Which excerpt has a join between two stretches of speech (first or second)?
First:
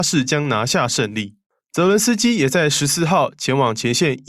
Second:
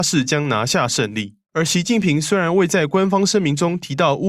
second